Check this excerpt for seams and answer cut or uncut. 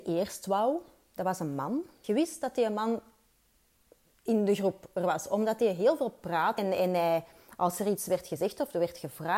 cut